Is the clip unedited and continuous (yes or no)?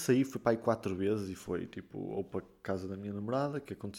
yes